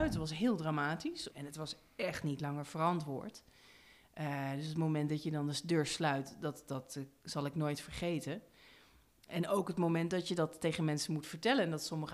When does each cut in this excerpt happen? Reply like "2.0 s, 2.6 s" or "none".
1.3 s